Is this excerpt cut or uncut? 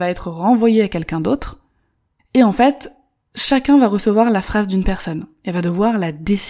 cut